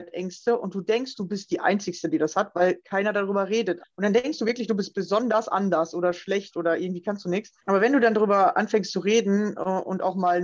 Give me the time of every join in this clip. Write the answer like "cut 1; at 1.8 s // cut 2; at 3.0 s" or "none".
cut 1; at 3.8 s // cut 2; at 7.6 s